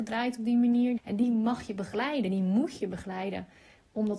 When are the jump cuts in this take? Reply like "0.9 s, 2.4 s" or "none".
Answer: 1.0 s